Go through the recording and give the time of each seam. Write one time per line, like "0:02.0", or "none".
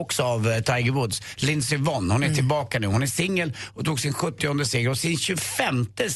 none